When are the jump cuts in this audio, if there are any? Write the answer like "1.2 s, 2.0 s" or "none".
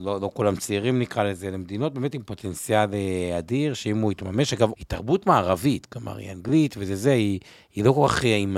4.7 s